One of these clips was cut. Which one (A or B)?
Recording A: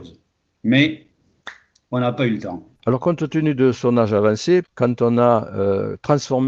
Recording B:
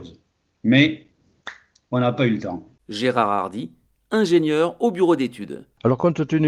A